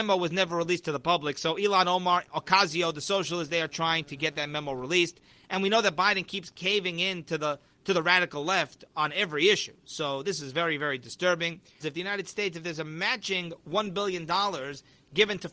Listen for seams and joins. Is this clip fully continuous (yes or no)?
no